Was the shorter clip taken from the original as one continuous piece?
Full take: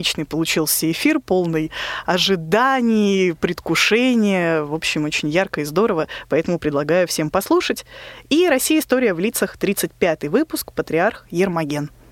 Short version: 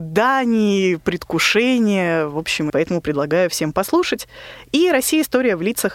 no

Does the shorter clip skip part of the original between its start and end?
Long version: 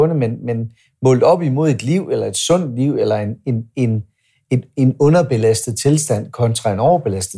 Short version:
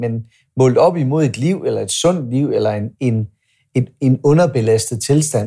yes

